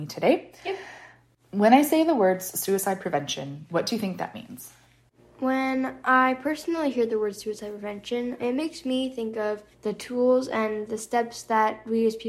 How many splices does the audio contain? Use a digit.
2